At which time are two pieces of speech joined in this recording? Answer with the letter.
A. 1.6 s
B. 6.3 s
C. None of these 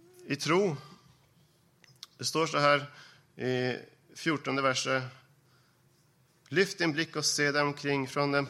B